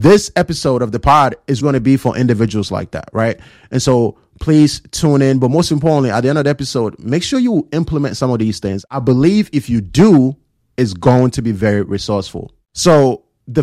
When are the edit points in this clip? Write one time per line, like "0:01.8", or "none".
0:01.6